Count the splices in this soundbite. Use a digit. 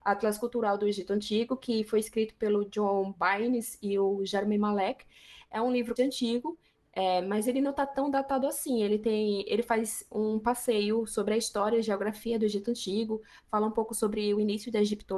1